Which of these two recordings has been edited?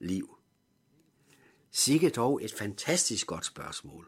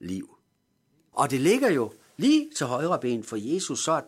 second; 1 cut; at 1.1 s

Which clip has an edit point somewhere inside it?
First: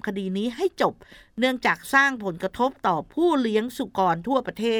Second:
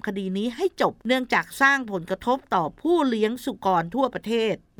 second; 1 cut; at 1.0 s

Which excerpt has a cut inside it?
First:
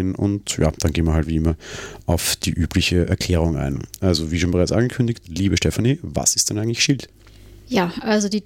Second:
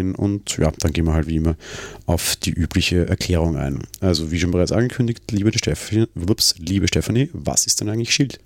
first; 1 cut; at 5.2 s

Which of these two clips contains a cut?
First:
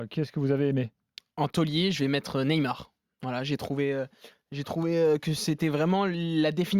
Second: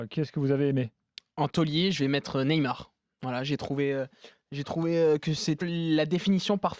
second; 1 cut; at 5.6 s

